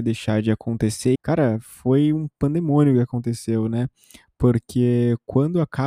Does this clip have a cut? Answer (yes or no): yes